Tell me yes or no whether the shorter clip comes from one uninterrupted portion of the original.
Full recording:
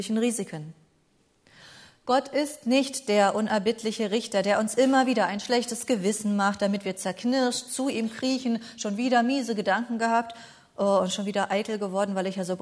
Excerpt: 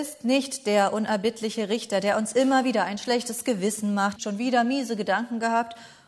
no